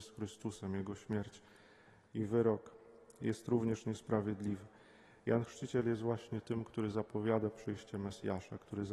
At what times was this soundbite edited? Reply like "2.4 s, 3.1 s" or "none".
none